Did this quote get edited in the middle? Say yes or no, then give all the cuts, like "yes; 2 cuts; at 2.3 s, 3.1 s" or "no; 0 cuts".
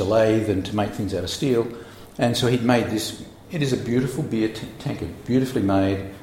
no; 0 cuts